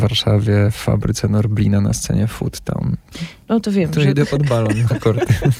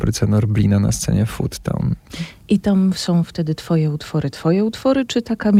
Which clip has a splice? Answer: first; 1 cut; at 3.4 s

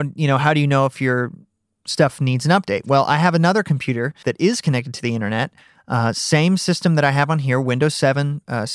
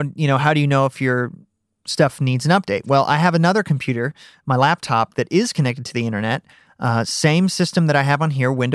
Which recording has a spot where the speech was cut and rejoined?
first; 1 cut; at 4.2 s

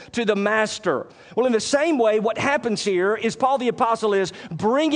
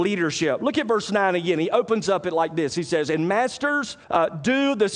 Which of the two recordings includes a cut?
second; 1 cut; at 4.0 s

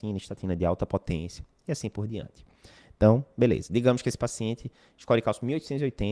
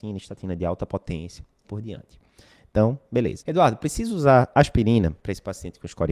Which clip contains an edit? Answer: second; 2 cuts; at 1.6 s, 3.4 s

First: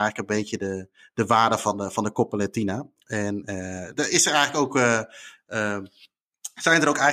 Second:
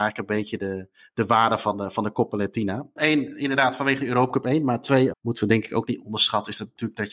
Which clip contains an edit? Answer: second; 2 cuts; at 3.0 s, 5.1 s

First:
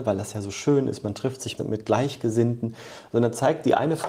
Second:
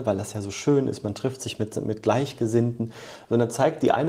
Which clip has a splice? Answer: first; 1 cut; at 1.6 s

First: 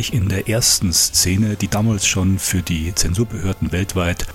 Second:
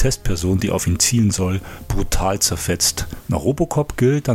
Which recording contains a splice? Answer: second; 1 cut; at 3.2 s

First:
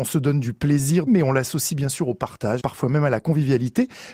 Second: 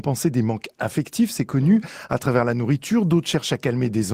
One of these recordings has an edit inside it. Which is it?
first; 2 cuts; at 1.1 s, 2.6 s

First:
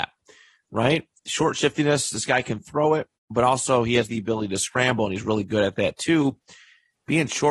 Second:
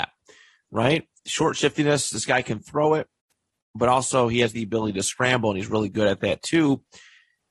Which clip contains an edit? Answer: first; 1 cut; at 3.2 s

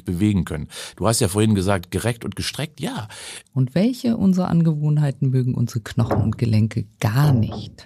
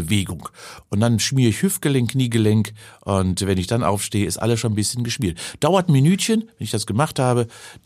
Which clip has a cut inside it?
first; 2 cuts; at 0.9 s, 3.5 s

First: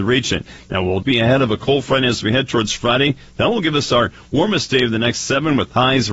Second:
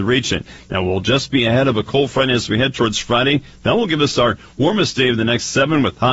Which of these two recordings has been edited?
first; 1 cut; at 1.0 s

